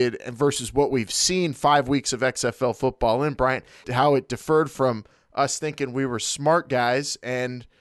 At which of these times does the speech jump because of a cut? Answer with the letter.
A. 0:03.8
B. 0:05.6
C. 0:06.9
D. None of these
A